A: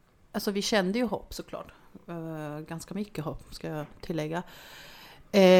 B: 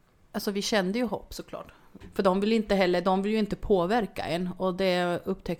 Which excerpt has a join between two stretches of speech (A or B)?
B